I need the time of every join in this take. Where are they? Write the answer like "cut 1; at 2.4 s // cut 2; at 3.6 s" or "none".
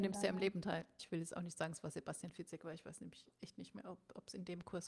cut 1; at 1.0 s